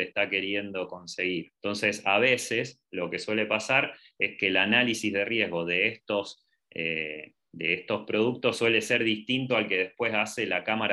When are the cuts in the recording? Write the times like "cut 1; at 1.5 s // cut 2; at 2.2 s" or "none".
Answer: cut 1; at 1.6 s